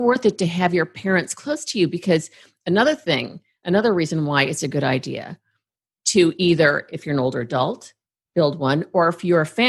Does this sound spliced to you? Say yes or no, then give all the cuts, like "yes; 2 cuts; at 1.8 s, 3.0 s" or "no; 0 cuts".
no; 0 cuts